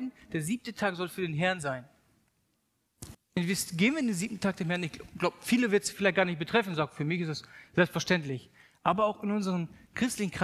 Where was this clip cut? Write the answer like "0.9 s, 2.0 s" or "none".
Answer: 3.1 s